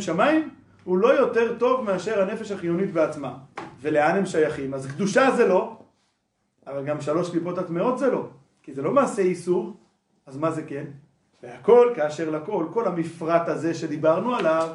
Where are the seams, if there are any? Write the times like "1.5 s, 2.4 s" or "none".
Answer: 11.3 s